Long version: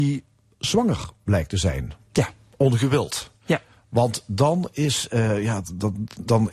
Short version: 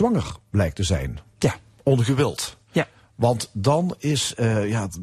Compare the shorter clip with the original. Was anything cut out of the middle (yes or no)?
no